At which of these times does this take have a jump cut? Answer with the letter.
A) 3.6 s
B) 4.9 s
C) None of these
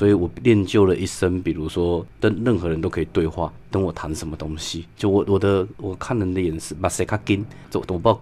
A